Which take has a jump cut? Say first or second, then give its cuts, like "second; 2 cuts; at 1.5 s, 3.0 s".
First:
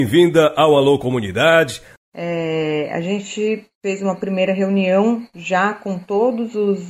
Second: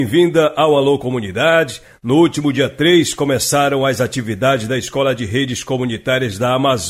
first; 1 cut; at 2.0 s